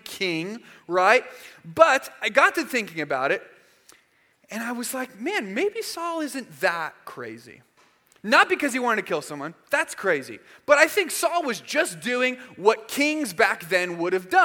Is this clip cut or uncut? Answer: uncut